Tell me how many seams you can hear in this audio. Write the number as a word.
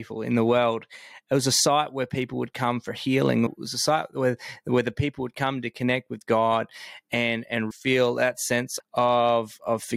three